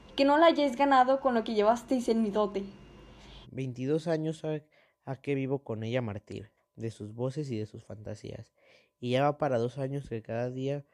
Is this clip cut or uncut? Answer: cut